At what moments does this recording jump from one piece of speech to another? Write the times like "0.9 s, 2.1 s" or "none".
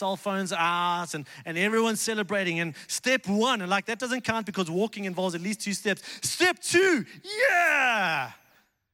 none